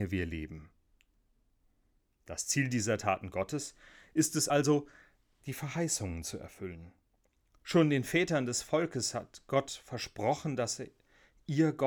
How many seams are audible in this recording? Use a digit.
0